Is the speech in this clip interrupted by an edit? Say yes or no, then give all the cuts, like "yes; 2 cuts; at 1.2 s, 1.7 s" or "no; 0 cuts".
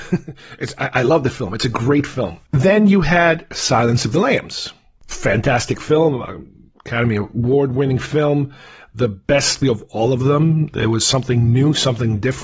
yes; 2 cuts; at 2.4 s, 9.6 s